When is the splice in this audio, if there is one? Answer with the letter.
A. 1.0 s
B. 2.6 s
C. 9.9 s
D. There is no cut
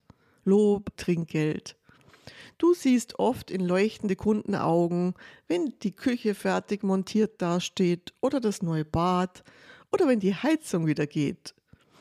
A